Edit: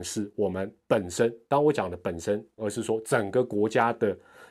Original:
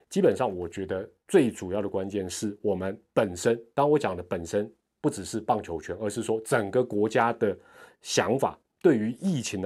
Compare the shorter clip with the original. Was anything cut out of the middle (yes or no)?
yes